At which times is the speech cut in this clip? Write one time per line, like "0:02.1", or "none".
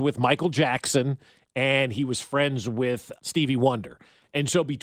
0:03.2